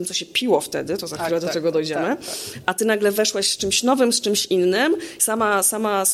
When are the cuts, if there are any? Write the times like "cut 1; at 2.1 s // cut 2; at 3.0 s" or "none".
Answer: none